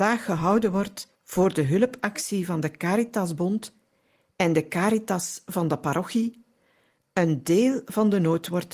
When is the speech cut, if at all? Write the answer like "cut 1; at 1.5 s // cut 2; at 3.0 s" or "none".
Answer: cut 1; at 1.1 s